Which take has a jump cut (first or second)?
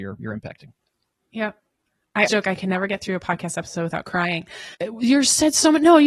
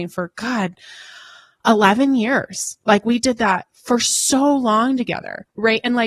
first